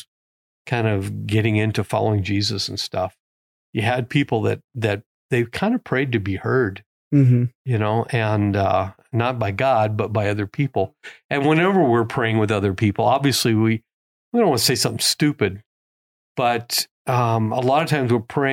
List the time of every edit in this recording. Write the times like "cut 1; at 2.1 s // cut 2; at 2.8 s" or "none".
none